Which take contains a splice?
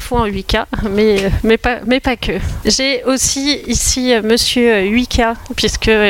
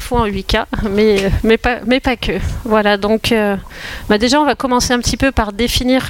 first; 1 cut; at 2.6 s

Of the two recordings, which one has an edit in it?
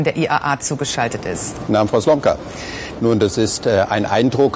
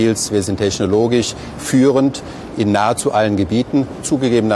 first; 2 cuts; at 1.7 s, 2.9 s

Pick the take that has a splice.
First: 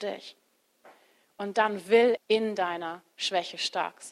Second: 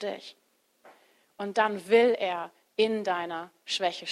first; 1 cut; at 2.2 s

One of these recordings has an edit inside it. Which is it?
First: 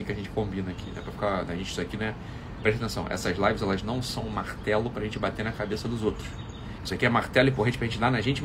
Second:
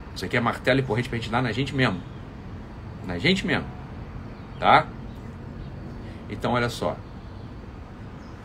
first; 1 cut; at 6.8 s

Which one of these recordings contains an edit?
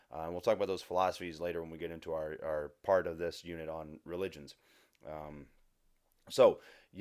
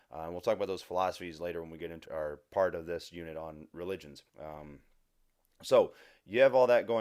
second; 2 cuts; at 2.1 s, 4.3 s

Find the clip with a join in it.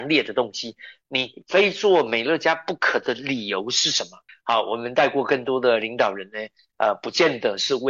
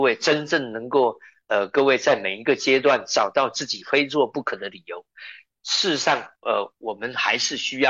first; 2 cuts; at 4.3 s, 6.7 s

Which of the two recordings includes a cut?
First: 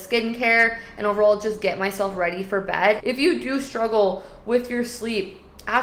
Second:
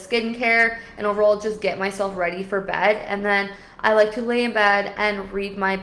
first; 1 cut; at 3.0 s

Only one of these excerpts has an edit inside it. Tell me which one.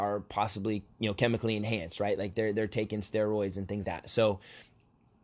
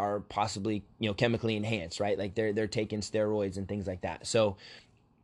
first; 1 cut; at 3.8 s

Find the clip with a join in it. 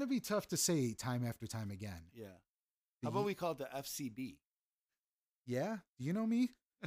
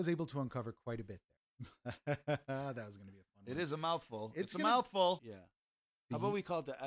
second; 2 cuts; at 1.5 s, 5.2 s

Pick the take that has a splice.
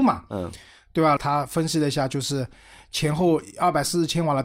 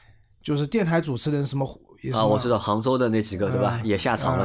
first; 1 cut; at 1.2 s

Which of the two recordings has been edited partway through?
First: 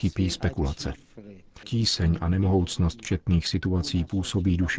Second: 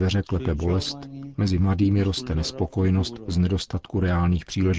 first; 1 cut; at 1.6 s

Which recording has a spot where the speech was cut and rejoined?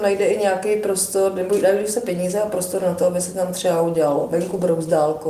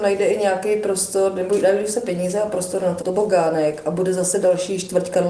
second; 1 cut; at 3.0 s

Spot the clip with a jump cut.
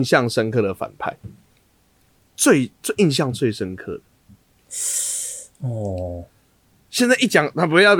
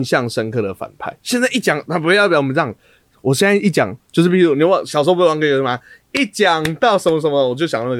second; 1 cut; at 1.2 s

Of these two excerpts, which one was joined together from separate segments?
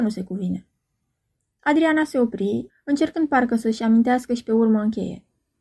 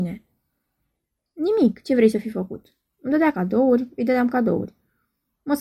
first; 1 cut; at 2.7 s

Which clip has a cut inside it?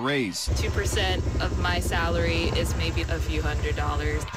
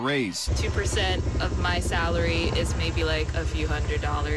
first; 1 cut; at 3.0 s

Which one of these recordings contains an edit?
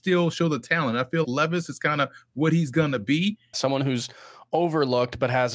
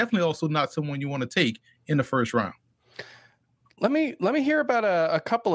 first; 2 cuts; at 1.2 s, 3.5 s

